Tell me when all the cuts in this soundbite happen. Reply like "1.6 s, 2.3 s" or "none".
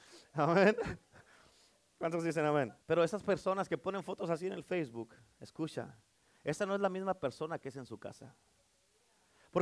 2.8 s